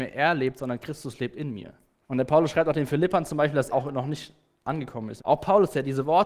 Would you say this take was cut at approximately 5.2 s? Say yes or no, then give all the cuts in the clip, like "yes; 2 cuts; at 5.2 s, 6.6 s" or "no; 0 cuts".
yes; 3 cuts; at 2.0 s, 3.7 s, 5.2 s